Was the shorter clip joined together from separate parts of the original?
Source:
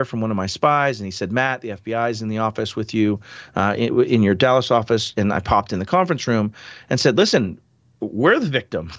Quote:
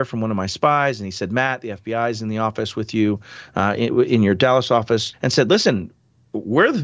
yes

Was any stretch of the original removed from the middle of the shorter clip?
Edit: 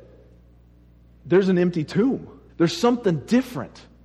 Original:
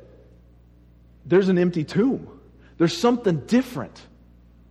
yes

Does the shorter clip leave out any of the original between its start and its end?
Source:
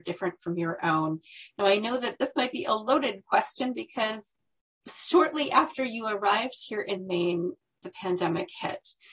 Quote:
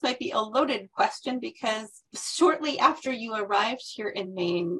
yes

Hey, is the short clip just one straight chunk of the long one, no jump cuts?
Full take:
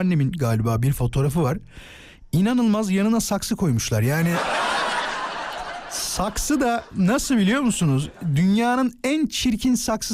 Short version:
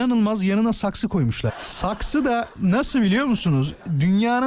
no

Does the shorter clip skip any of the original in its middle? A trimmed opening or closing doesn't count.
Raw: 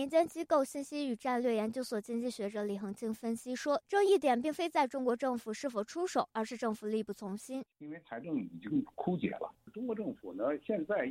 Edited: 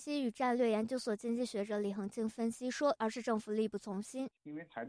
yes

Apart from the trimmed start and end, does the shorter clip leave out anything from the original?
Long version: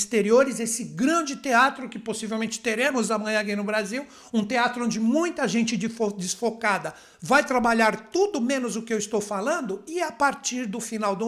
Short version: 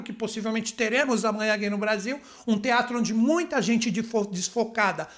no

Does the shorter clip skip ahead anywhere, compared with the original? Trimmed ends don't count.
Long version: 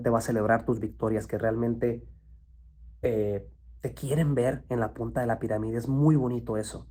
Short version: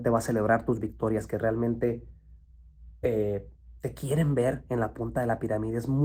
no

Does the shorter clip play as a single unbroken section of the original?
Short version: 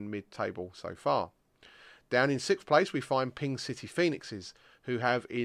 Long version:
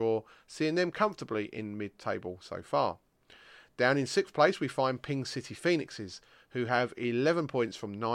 yes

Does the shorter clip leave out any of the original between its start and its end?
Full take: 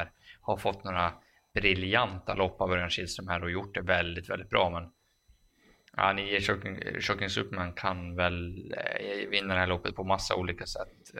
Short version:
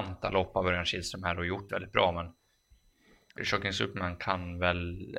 yes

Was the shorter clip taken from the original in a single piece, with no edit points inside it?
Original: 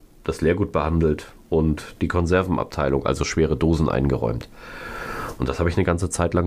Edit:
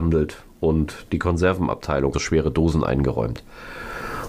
no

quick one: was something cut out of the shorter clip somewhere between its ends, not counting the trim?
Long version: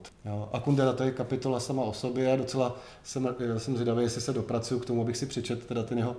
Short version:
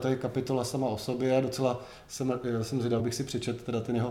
yes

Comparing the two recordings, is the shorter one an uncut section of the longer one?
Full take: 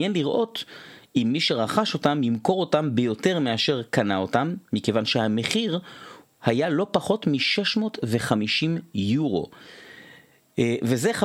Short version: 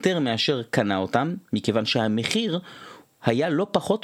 yes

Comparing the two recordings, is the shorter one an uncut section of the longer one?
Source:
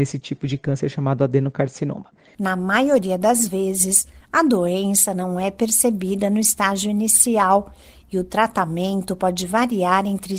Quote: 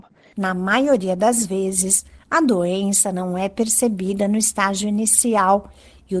yes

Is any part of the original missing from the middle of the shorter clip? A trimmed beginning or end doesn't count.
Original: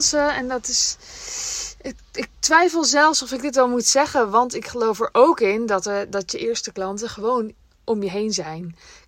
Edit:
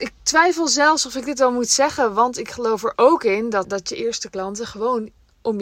yes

